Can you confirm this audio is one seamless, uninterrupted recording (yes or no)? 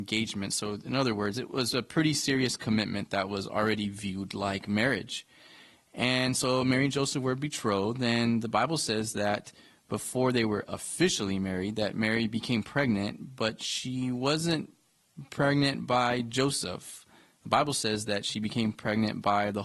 yes